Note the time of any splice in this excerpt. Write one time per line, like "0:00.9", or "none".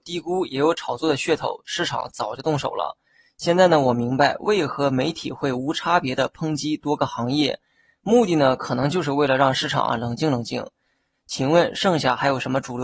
0:11.1